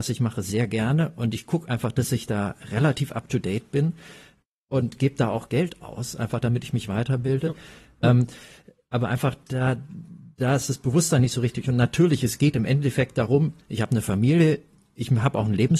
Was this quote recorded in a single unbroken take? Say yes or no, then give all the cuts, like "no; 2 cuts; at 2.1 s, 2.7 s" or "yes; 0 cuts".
no; 1 cut; at 8.0 s